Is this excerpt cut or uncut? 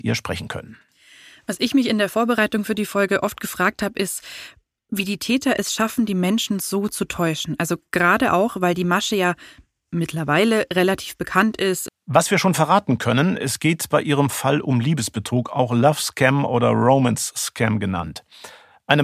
cut